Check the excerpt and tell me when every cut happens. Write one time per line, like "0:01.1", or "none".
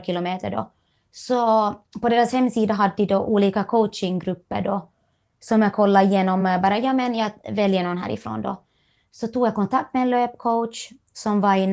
none